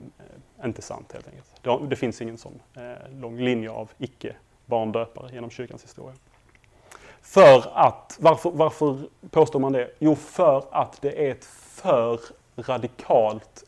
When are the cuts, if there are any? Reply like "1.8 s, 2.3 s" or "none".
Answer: none